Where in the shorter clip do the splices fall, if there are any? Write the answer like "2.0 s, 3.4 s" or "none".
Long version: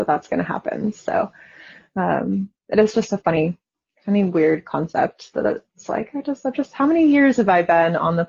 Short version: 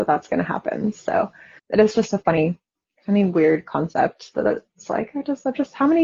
1.6 s